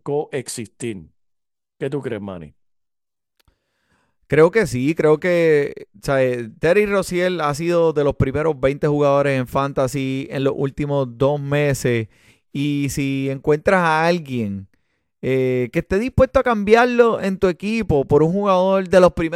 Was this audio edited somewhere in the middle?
no; 0 cuts

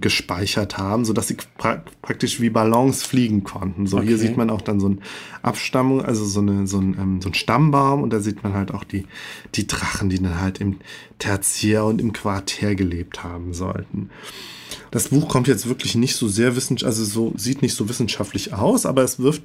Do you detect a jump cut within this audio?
yes; 1 cut; at 14.9 s

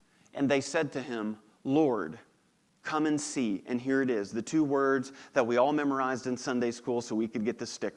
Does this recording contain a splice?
no; 0 cuts

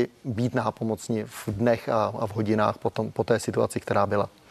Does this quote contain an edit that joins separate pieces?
no; 0 cuts

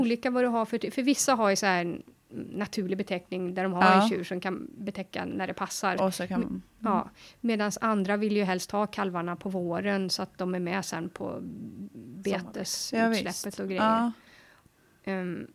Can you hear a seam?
yes; 1 cut; at 6.0 s

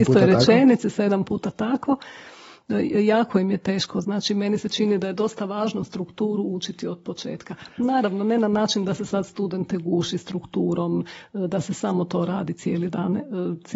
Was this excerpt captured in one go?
yes; 0 cuts

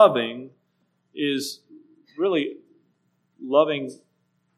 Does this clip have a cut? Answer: no; 0 cuts

